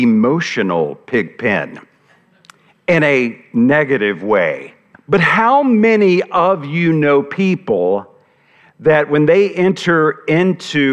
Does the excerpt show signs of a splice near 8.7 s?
no; 1 cut; at 4.9 s

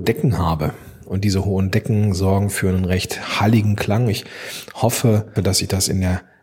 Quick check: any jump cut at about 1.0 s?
no; 1 cut; at 5.4 s

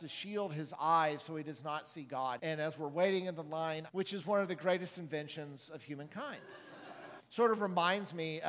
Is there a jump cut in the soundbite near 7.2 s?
yes; 3 cuts; at 2.4 s, 3.9 s, 7.2 s

